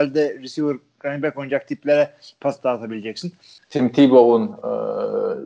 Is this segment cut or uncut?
cut